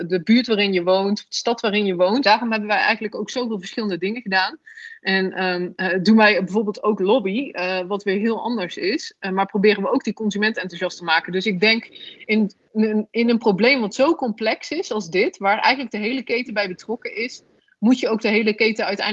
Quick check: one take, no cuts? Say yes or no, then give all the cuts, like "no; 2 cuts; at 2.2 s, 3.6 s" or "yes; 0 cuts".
no; 1 cut; at 2.2 s